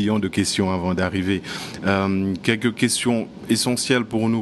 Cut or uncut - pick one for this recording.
uncut